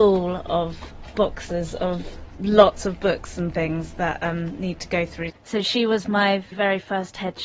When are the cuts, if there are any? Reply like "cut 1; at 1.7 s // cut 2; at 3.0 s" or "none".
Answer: cut 1; at 5.3 s // cut 2; at 6.5 s